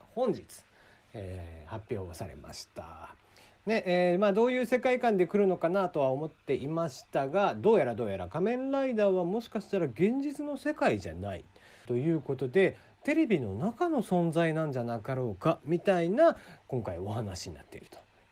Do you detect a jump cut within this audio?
yes; 1 cut; at 11.9 s

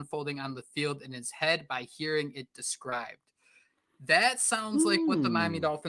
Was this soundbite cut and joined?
no; 0 cuts

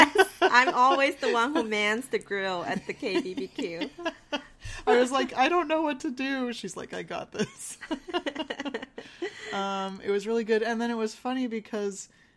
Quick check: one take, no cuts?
yes; 0 cuts

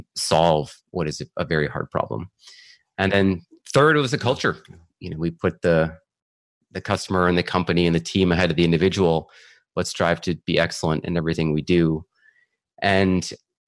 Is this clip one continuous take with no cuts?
no; 1 cut; at 4.9 s

